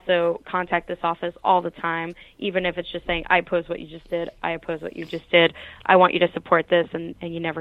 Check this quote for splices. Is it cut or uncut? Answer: uncut